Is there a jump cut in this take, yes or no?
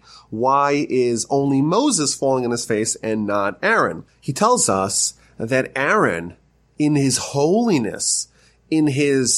yes